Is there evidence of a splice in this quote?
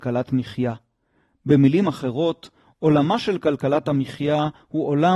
no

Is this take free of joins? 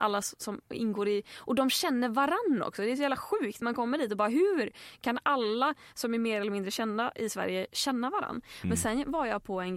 yes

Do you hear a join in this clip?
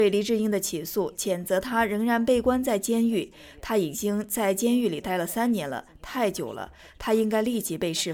no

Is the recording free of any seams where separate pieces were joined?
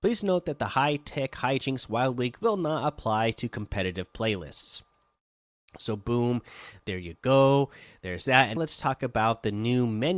no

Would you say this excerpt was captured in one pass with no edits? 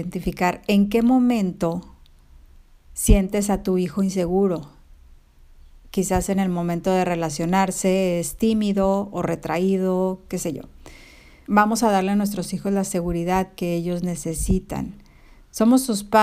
no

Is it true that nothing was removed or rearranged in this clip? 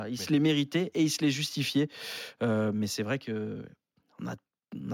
yes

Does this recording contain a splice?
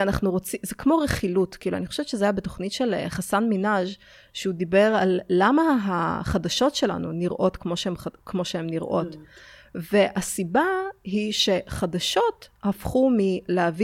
no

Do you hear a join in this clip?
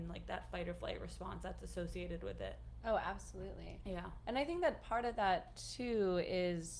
no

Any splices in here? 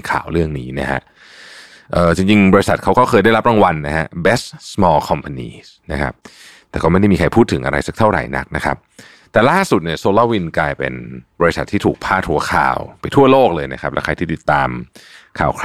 yes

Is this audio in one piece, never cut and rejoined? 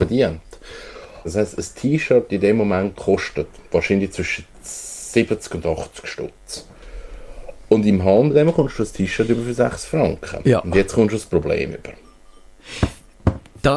no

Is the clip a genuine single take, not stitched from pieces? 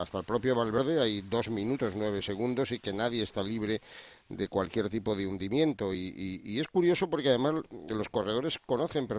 yes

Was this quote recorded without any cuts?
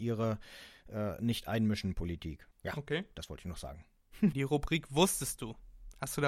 no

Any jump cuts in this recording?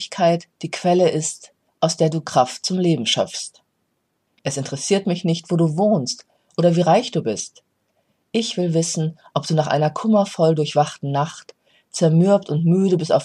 yes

